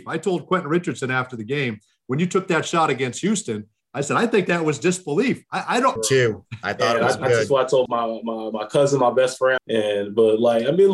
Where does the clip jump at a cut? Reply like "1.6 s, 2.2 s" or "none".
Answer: 6.0 s, 7.9 s, 9.6 s